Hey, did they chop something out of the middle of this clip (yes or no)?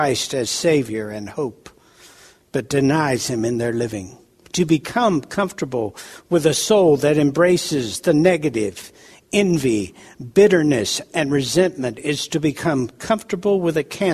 no